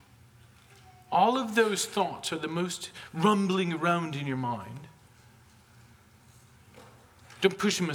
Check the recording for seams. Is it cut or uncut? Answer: uncut